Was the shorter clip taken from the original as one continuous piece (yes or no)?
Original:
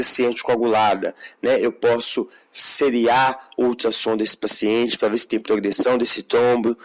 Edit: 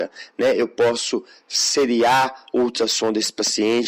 yes